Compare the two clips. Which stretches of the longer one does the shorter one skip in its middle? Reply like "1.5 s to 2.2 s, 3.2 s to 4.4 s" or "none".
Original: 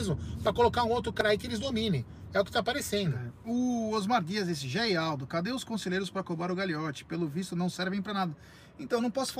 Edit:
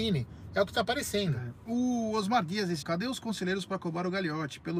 4.6 s to 5.3 s